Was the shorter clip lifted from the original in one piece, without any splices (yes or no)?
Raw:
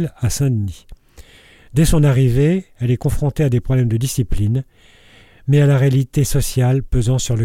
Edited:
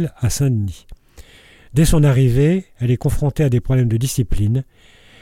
yes